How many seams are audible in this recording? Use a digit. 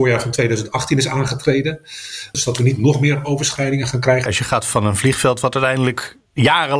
2